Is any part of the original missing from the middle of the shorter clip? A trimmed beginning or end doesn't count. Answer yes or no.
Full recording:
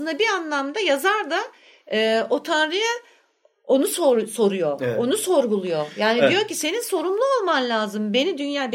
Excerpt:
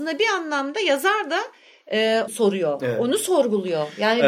yes